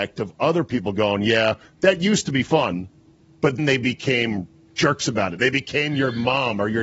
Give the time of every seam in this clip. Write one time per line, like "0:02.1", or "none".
0:03.6